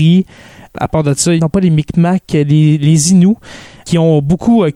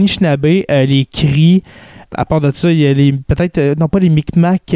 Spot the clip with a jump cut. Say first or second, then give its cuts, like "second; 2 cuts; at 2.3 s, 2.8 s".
first; 1 cut; at 1.4 s